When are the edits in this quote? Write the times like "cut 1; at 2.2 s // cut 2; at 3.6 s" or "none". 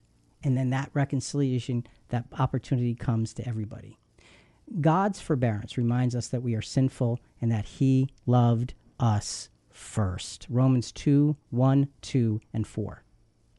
none

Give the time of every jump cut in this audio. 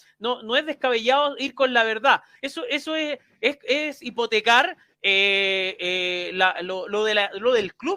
cut 1; at 2.4 s

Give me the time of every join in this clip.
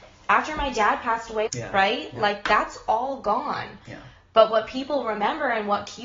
cut 1; at 1.5 s

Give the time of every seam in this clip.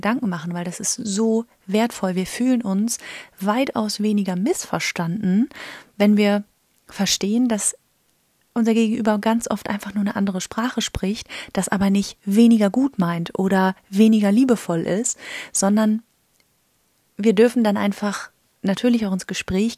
none

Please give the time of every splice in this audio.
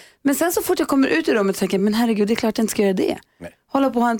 none

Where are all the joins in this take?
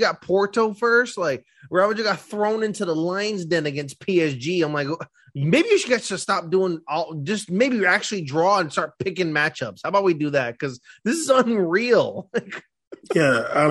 none

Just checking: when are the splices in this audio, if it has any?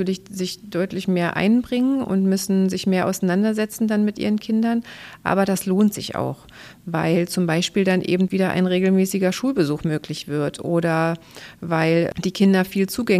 none

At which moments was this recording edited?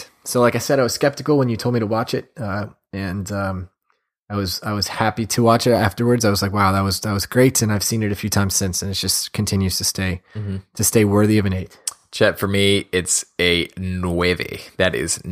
none

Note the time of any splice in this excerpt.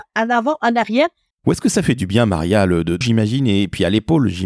cut 1; at 1.3 s // cut 2; at 3.0 s

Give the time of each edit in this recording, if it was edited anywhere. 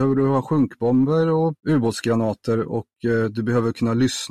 cut 1; at 1.6 s

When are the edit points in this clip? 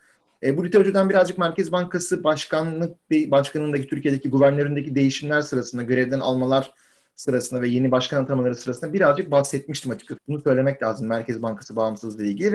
cut 1; at 10.2 s

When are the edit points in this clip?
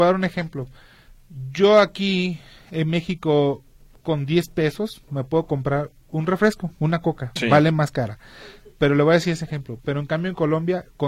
cut 1; at 7.4 s

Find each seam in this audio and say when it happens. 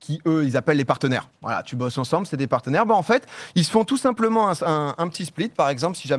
none

